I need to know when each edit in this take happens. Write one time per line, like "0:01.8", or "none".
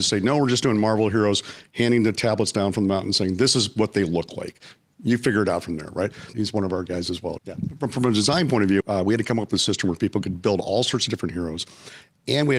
0:06.3
0:07.4
0:08.8

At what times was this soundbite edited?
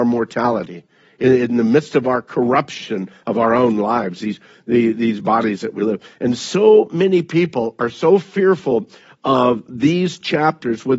none

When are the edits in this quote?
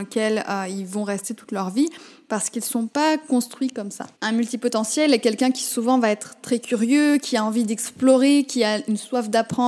0:04.2

